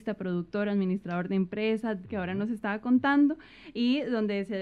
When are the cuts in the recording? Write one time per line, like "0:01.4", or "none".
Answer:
0:02.0